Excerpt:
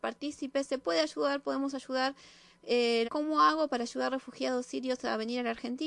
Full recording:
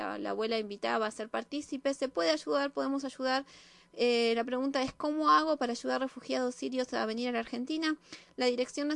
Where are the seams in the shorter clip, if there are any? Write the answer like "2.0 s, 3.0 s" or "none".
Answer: 3.0 s